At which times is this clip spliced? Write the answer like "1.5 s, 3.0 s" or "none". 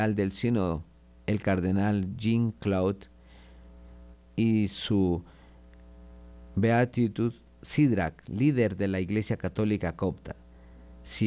4.1 s